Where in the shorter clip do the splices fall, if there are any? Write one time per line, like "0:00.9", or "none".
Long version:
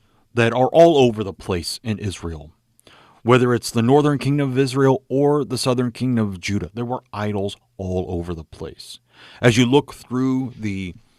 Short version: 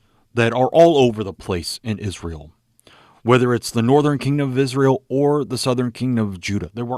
none